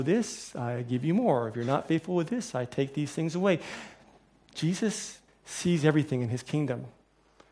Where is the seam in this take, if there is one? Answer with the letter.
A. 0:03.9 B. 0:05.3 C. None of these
B